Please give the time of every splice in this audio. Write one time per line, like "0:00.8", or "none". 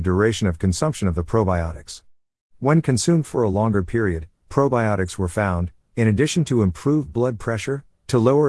0:02.5